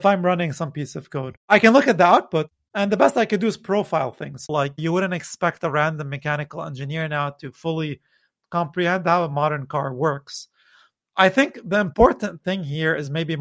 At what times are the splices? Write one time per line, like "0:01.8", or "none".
0:04.5